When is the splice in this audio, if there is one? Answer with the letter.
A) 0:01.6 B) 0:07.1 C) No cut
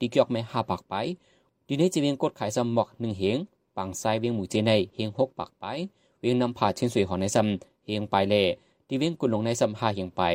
C